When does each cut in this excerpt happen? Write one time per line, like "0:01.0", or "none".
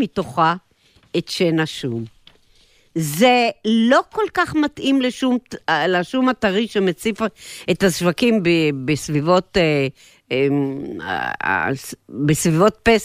none

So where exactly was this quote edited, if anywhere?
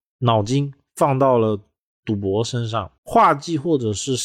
0:03.0

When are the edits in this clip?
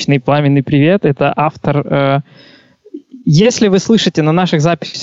none

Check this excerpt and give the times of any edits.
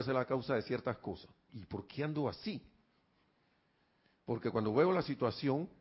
0:01.5

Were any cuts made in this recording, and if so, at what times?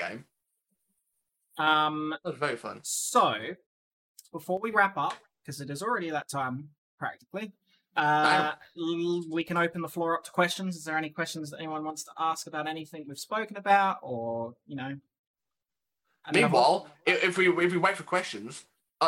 none

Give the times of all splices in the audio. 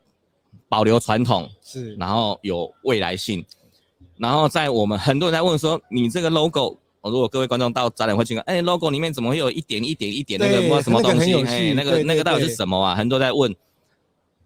none

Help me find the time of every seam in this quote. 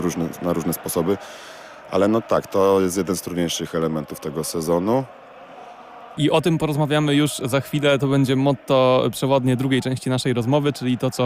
0:06.2

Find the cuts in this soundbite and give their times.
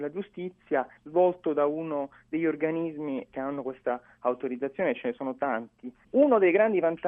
0:03.3
0:06.0

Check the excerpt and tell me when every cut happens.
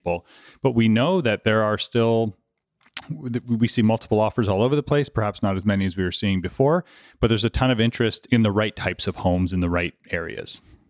none

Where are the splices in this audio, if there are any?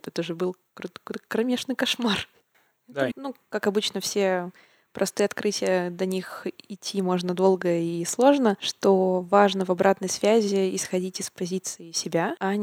0:03.1

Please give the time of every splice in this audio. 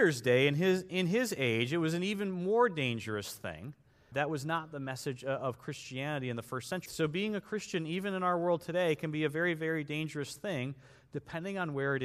0:04.1
0:06.9

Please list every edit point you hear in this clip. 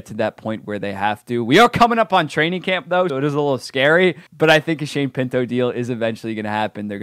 0:03.1
0:04.3

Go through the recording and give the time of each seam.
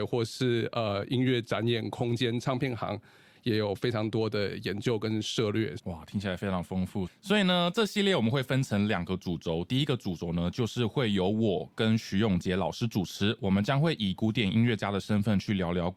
0:05.8
0:07.1

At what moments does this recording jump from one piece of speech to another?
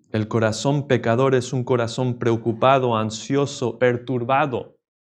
0:03.8

